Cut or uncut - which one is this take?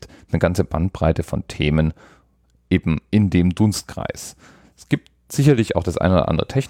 uncut